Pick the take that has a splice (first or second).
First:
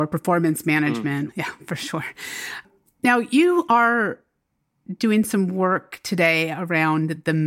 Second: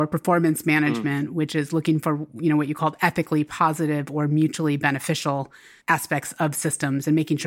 first